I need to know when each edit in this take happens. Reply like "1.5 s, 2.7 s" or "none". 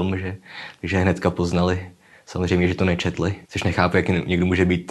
3.4 s